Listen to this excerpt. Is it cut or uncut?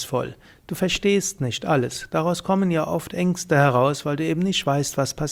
uncut